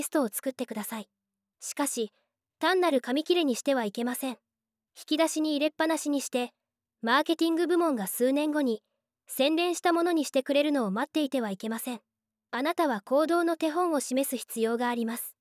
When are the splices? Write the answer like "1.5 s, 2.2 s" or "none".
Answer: none